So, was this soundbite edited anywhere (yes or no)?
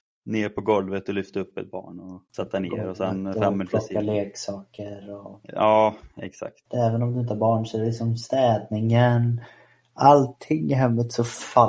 yes